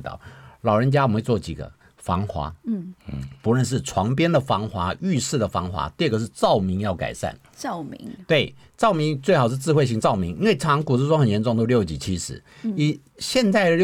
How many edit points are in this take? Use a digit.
0